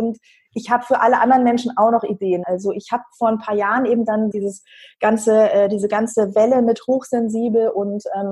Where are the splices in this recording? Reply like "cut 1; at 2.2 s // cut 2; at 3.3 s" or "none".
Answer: cut 1; at 2.4 s // cut 2; at 4.3 s

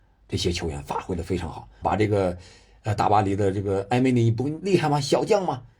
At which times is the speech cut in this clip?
cut 1; at 1.8 s

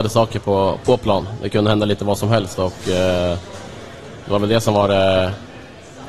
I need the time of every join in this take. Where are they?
none

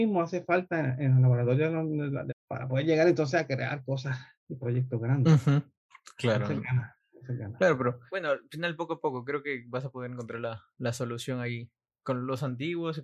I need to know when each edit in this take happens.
cut 1; at 2.3 s

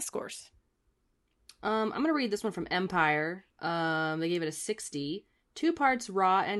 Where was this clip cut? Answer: cut 1; at 3.5 s

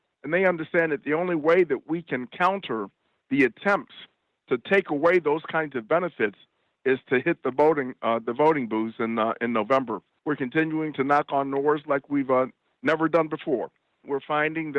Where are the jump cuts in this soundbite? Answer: cut 1; at 10.2 s

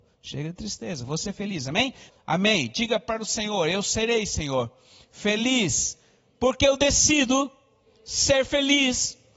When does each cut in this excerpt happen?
cut 1; at 2.1 s

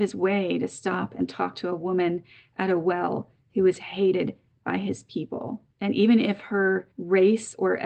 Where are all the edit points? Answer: cut 1; at 5.7 s

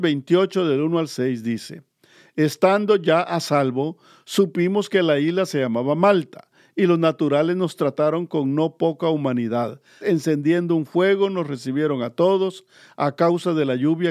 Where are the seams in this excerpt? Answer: cut 1; at 10.0 s

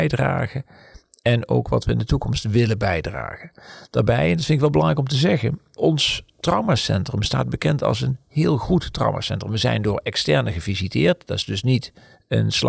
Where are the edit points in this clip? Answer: cut 1; at 5.8 s

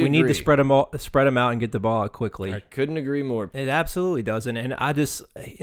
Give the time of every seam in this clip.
cut 1; at 3.5 s

